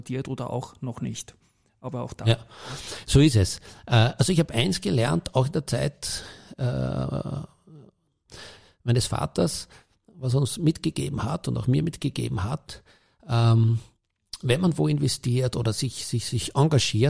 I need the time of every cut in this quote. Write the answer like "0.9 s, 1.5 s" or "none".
none